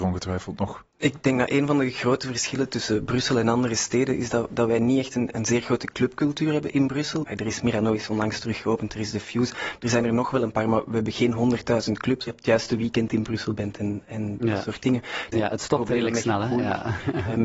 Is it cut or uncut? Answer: cut